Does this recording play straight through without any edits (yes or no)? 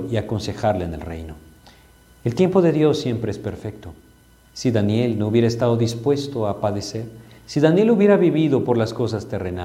yes